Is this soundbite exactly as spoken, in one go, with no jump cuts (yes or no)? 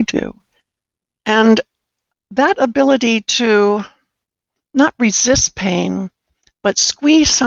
yes